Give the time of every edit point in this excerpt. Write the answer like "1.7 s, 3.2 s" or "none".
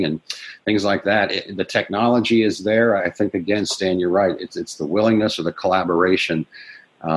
none